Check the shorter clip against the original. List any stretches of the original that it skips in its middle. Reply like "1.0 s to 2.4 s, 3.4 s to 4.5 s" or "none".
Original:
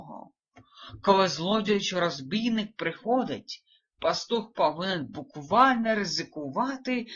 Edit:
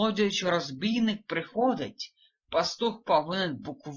none